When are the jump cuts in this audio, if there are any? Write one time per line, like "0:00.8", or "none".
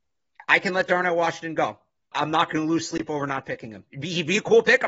0:02.1